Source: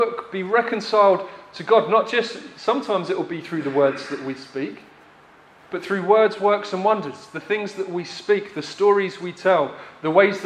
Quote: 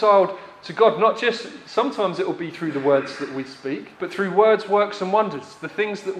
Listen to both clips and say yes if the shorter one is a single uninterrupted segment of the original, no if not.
no